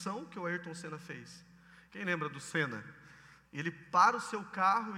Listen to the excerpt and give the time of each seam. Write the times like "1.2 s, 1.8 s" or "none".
1.9 s, 3.4 s